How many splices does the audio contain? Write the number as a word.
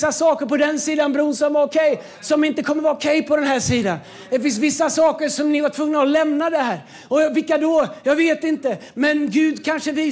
zero